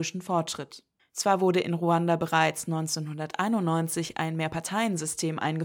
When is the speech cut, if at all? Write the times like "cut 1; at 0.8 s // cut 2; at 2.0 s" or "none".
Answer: cut 1; at 1.0 s